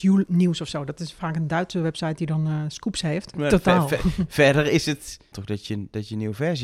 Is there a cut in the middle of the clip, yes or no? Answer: yes